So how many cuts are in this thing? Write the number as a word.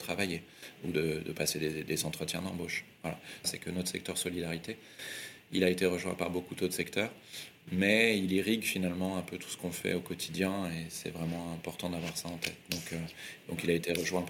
one